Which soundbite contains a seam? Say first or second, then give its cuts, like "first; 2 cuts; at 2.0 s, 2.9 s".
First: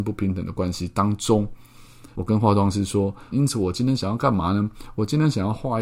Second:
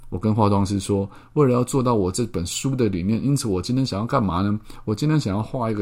first; 2 cuts; at 2.1 s, 3.3 s